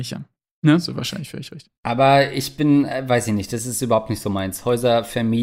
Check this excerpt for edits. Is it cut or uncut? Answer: cut